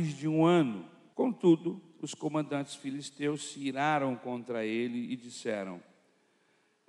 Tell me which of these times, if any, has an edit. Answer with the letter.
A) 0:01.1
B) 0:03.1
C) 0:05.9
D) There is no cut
A